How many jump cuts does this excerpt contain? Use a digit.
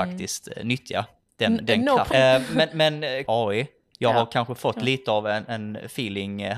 2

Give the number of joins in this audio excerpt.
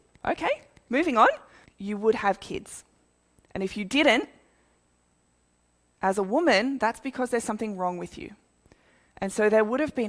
1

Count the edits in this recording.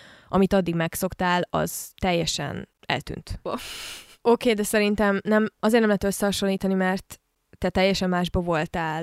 1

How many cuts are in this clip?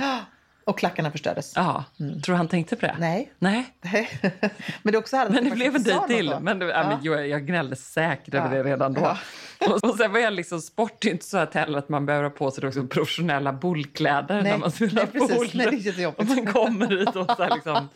1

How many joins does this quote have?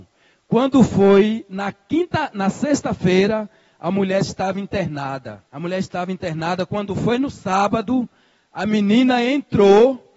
1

